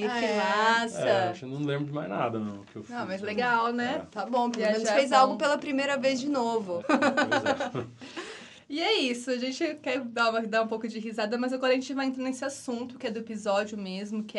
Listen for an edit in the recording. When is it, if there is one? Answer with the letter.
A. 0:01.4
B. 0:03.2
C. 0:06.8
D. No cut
C